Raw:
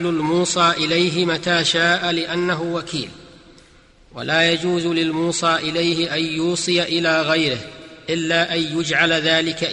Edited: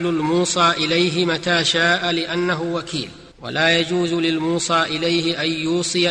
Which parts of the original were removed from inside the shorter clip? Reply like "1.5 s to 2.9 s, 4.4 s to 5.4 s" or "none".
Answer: 3.3 s to 4.0 s